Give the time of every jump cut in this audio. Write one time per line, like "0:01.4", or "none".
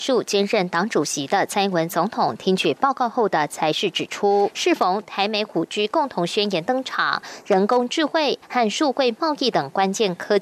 0:07.4